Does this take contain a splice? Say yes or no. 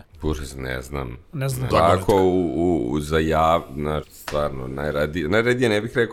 yes